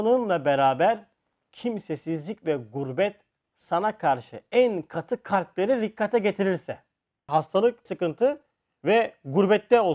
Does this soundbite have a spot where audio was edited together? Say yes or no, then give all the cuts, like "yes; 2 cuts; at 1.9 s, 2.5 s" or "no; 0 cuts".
yes; 1 cut; at 7.9 s